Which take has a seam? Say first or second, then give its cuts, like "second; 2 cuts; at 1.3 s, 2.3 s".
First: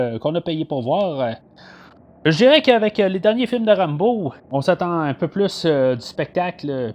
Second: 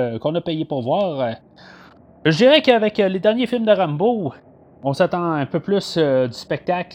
first; 1 cut; at 4.4 s